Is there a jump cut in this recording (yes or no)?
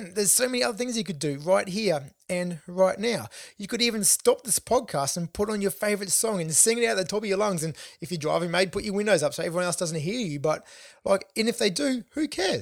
no